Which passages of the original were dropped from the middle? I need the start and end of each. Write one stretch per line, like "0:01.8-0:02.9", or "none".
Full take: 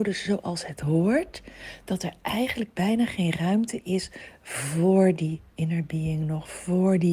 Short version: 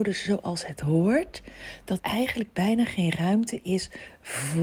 0:02.0-0:02.2